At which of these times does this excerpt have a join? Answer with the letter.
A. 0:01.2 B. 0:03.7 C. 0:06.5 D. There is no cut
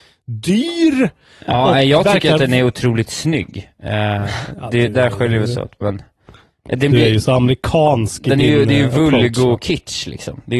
D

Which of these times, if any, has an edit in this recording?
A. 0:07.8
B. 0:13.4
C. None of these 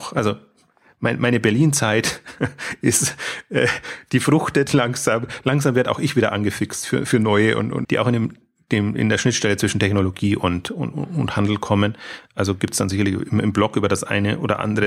A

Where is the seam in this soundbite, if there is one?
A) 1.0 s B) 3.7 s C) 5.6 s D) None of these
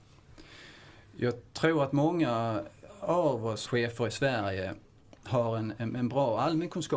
B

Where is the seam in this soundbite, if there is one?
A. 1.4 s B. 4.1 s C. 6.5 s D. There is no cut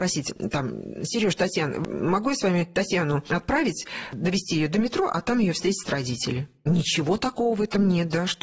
D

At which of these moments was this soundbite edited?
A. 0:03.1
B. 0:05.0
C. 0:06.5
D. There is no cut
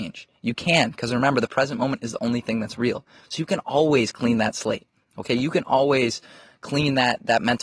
D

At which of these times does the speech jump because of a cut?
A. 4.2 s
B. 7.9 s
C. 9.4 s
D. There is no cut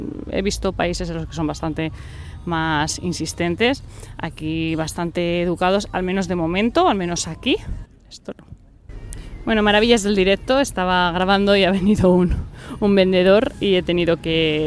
B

